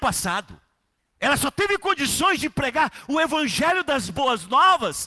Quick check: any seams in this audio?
no; 0 cuts

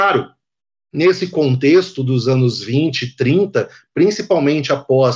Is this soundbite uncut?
yes; 0 cuts

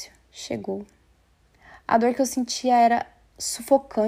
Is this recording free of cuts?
yes; 0 cuts

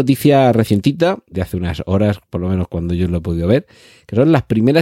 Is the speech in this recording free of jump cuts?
no; 1 cut; at 1.3 s

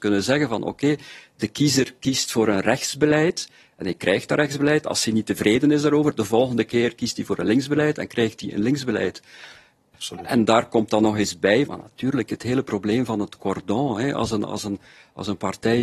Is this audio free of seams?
no; 2 cuts; at 9.9 s, 11.7 s

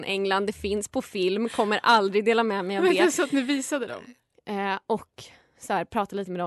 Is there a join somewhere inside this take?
yes; 1 cut; at 4.3 s

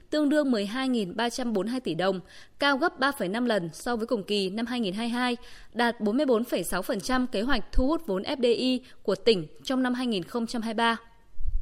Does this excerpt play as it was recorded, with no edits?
yes; 0 cuts

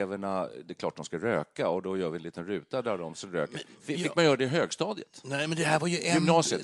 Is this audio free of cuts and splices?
yes; 0 cuts

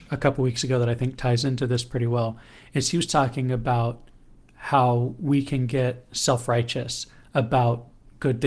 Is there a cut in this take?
no; 0 cuts

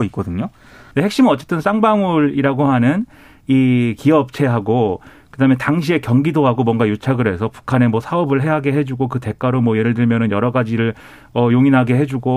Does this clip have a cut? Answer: yes; 1 cut; at 0.9 s

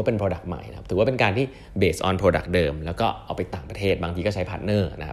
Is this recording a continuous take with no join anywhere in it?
no; 1 cut; at 3.5 s

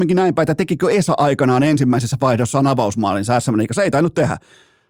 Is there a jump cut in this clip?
no; 0 cuts

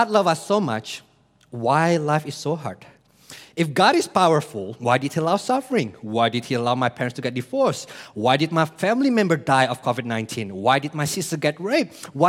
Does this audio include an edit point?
no; 0 cuts

